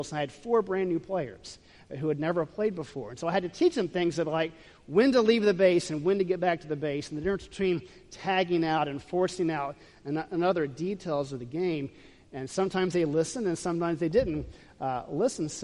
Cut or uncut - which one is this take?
uncut